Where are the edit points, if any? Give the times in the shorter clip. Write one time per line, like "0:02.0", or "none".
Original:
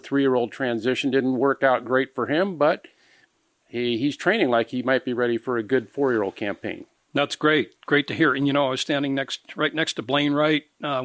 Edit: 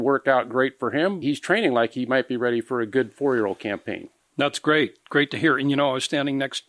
0:01.2

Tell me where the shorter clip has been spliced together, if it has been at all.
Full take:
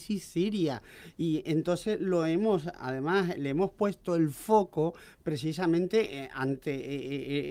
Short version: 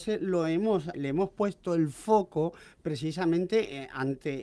0:00.9

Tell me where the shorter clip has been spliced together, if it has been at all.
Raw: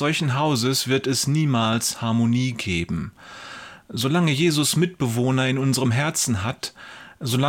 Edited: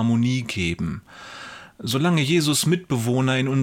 none

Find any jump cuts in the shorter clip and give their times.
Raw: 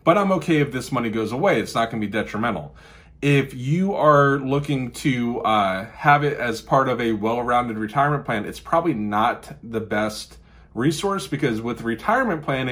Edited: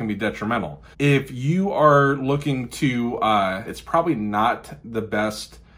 0:00.9
0:03.7

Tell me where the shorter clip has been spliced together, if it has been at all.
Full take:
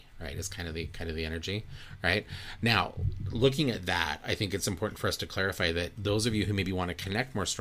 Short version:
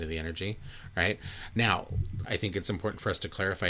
0:02.2

